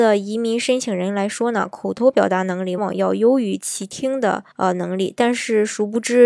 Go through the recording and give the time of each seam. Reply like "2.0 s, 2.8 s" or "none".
2.8 s, 4.5 s